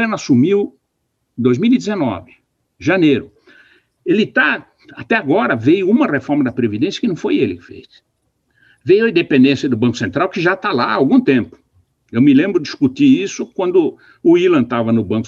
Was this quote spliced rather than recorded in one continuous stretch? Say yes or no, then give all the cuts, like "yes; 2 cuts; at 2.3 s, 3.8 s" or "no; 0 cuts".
no; 0 cuts